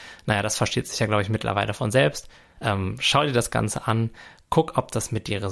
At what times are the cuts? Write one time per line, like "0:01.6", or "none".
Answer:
0:02.6